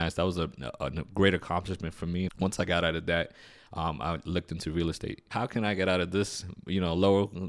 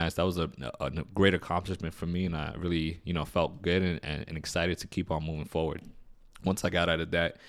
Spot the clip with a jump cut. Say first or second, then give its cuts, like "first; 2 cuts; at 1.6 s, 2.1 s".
first; 2 cuts; at 2.3 s, 5.3 s